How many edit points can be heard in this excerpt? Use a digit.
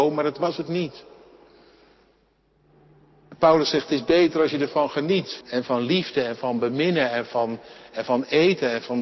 1